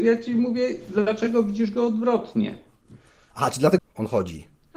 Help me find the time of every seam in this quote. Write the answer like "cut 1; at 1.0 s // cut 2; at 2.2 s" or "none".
cut 1; at 3.8 s